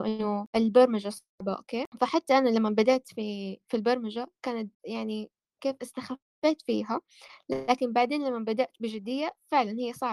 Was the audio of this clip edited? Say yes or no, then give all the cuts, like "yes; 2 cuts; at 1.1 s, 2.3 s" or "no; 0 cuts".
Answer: no; 0 cuts